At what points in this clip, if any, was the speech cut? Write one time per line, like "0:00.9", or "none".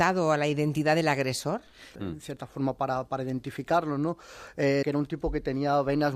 0:02.0
0:04.8